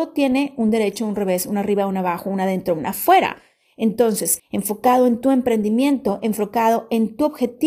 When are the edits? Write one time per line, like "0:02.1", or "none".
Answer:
0:04.4